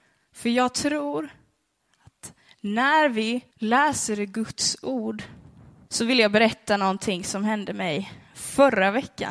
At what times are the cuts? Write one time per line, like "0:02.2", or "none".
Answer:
0:03.5
0:05.9